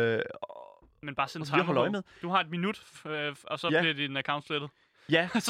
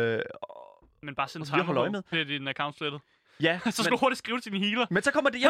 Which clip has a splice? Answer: second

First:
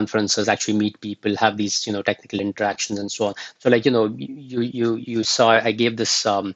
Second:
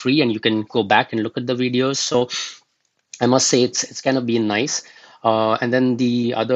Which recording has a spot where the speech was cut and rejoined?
first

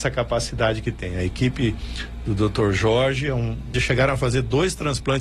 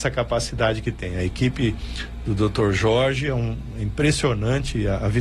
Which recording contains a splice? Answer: first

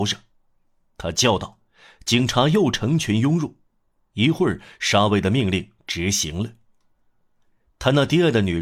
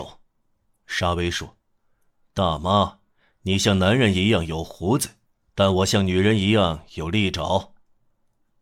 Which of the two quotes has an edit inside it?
first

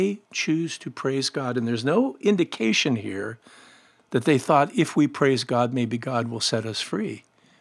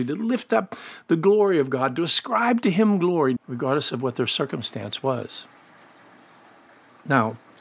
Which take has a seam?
second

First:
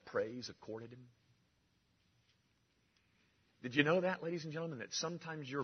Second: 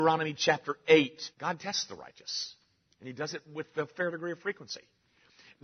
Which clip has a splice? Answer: second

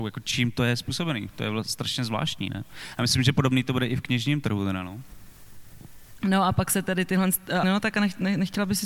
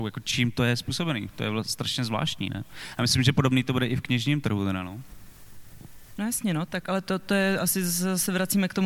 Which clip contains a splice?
first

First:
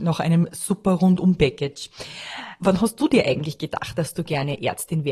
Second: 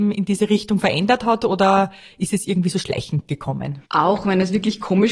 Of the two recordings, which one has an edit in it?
second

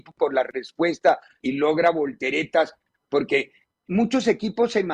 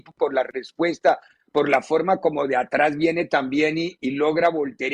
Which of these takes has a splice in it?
first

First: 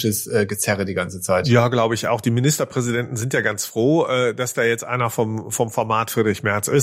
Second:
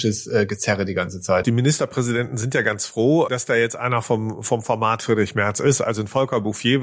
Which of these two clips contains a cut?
second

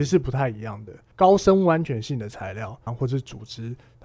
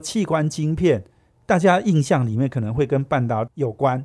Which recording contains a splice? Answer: first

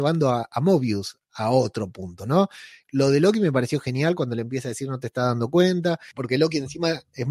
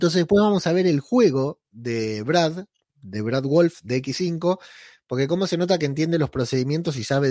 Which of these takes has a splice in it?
first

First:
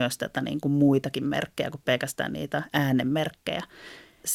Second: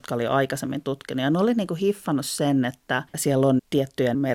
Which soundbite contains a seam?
second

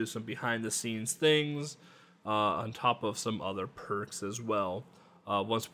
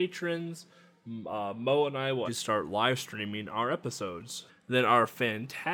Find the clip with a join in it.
second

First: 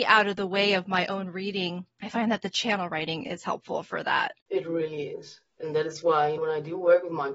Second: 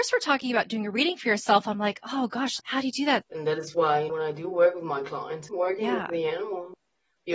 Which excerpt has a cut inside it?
second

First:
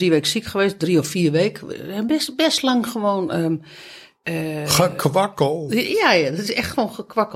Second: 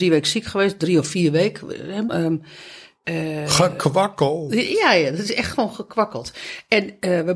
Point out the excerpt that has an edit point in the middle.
second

